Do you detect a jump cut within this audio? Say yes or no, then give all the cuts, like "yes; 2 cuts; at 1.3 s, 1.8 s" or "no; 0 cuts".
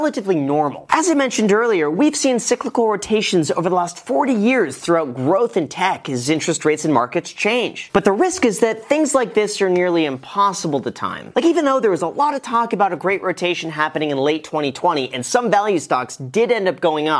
no; 0 cuts